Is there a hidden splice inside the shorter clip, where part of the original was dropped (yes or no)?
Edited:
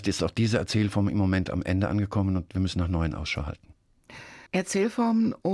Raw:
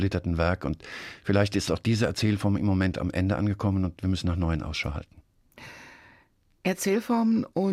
yes